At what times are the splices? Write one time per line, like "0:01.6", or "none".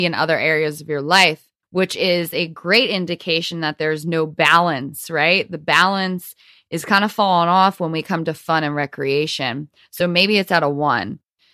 none